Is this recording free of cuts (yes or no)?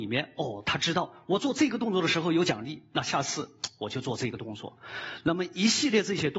yes